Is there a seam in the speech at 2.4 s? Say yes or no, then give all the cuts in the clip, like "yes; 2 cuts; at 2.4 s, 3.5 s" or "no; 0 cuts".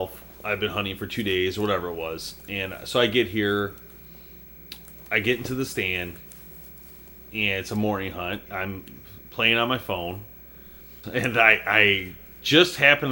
no; 2 cuts; at 8.5 s, 11.0 s